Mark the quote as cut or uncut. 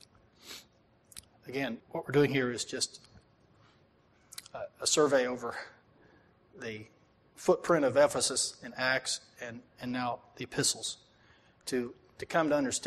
cut